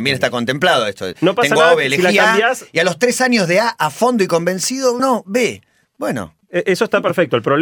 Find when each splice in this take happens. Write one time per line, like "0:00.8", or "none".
0:05.0
0:06.4